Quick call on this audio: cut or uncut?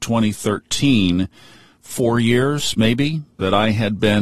uncut